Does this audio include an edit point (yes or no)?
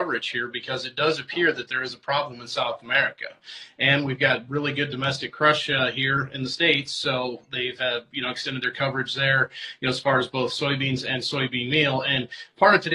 no